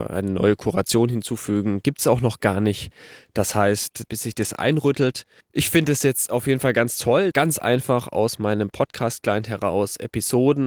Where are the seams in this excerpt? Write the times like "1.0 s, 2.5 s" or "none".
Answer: 4.1 s, 7.3 s